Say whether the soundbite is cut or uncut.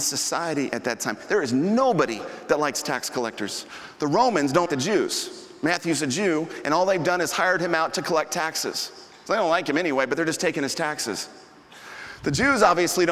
cut